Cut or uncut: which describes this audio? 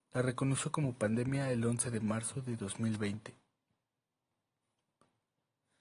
uncut